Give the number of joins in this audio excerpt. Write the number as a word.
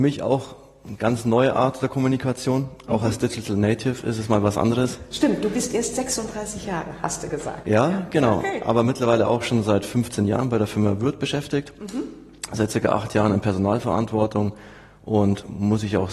zero